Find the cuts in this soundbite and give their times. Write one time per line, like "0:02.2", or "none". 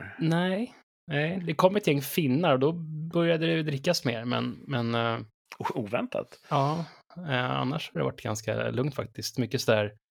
none